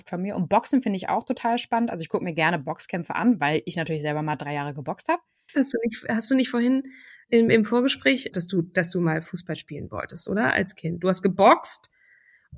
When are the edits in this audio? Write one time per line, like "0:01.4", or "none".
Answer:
0:05.5
0:08.3